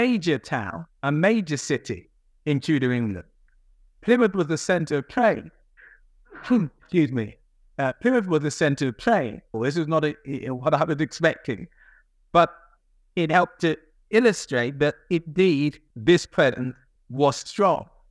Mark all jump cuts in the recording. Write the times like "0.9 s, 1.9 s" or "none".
9.5 s, 17.0 s